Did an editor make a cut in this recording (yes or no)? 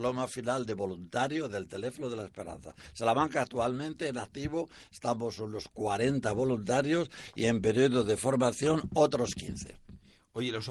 no